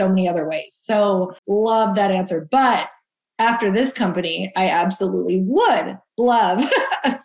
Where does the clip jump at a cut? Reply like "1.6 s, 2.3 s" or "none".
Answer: 1.4 s